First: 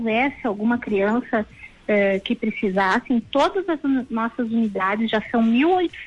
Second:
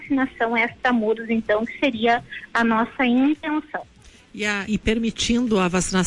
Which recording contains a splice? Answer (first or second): second